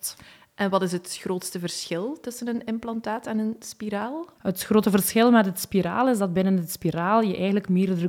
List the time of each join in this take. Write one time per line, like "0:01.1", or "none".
0:04.3